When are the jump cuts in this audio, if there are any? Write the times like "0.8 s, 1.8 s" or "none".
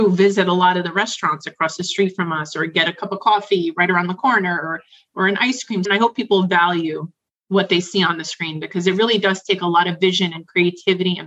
5.8 s